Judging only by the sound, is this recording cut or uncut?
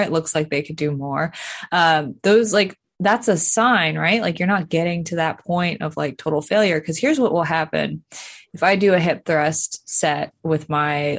uncut